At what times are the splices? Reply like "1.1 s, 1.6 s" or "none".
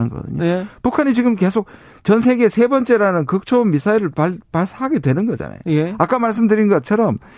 none